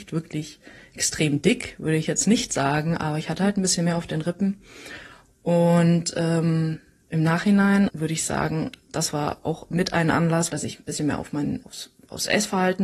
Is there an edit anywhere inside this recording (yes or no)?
yes